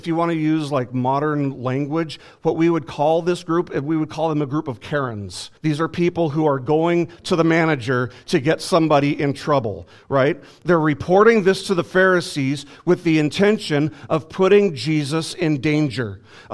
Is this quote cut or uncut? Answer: cut